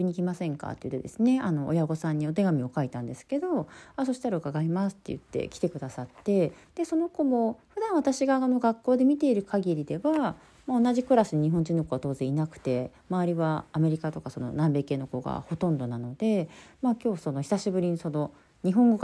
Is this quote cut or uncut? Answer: cut